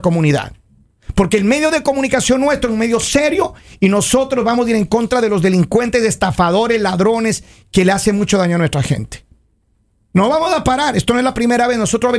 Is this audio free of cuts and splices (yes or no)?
yes